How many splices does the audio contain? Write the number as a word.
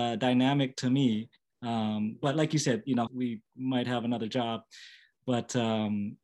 two